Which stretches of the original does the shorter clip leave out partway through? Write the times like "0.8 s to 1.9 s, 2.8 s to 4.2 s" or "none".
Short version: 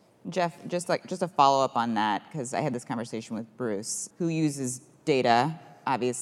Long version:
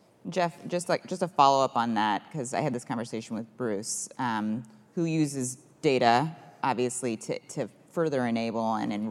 4.1 s to 4.9 s